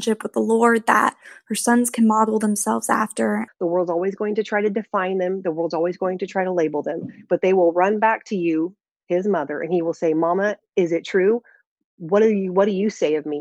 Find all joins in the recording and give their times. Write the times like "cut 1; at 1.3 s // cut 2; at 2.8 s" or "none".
cut 1; at 3.5 s